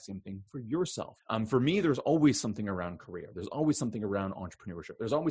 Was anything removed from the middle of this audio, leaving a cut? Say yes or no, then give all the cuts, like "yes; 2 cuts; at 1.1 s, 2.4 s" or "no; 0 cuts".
yes; 1 cut; at 1.2 s